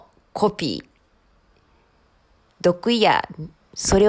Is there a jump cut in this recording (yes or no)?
yes